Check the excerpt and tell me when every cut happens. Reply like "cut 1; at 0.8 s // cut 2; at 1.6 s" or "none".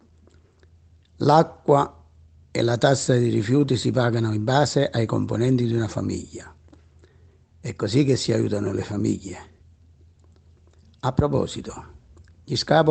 none